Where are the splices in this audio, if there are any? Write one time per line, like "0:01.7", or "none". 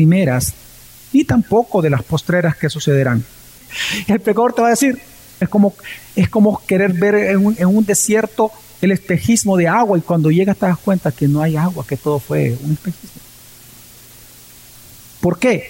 0:03.6
0:05.4